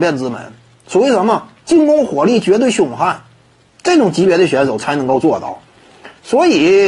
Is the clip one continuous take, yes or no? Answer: yes